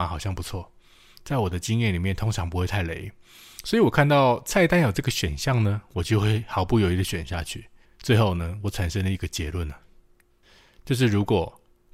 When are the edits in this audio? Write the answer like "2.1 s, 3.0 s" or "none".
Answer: 7.8 s